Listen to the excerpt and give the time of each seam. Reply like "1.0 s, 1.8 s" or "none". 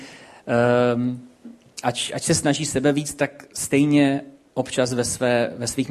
none